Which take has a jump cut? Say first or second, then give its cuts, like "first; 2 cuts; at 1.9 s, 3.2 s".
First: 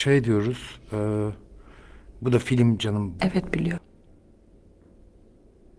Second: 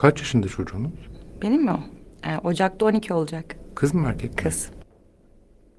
first; 1 cut; at 3.2 s